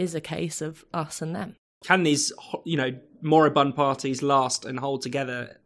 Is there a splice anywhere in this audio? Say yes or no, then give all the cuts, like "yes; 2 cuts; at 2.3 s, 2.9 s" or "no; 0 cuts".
yes; 1 cut; at 1.8 s